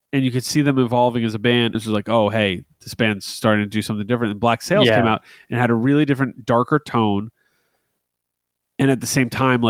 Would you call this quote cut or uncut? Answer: cut